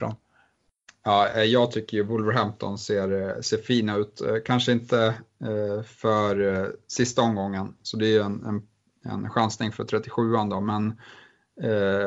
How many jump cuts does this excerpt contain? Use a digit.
0